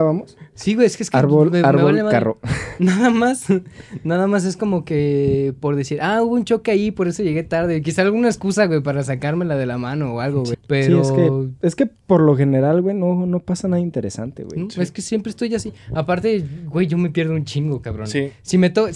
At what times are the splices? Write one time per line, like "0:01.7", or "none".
0:10.5